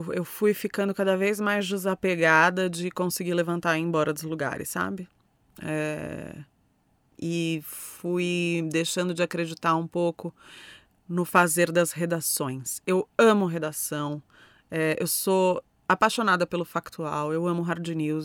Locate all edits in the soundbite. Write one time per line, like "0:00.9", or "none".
none